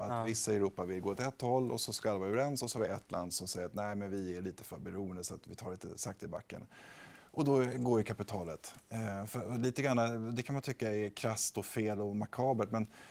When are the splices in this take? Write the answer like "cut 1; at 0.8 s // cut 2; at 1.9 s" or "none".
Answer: none